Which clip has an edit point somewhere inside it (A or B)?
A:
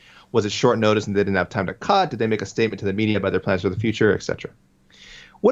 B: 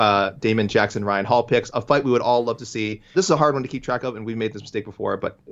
B